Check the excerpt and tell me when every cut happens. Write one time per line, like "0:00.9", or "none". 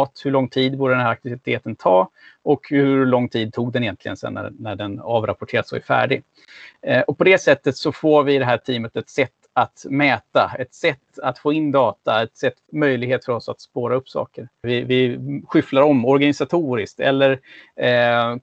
0:14.6